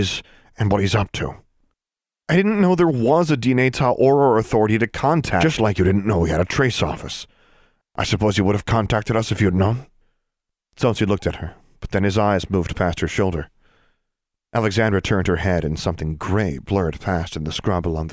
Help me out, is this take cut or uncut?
uncut